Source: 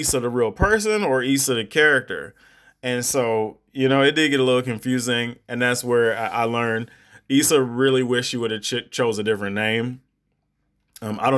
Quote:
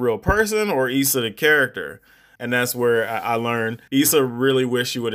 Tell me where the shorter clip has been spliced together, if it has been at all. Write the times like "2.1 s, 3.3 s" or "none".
2.4 s, 3.9 s